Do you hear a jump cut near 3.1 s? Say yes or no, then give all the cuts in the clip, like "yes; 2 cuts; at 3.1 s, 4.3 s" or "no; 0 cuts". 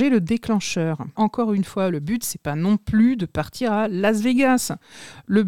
no; 1 cut; at 1.2 s